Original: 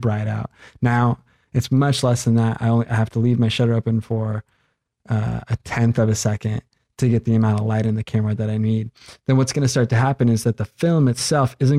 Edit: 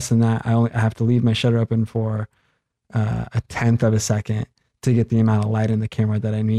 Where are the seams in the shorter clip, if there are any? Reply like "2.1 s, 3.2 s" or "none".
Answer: none